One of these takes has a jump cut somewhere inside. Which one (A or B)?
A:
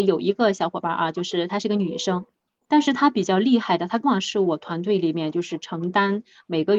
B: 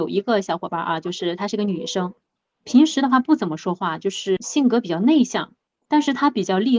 A